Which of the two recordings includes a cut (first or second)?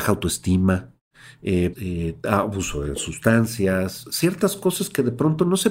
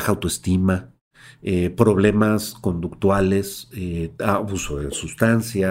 first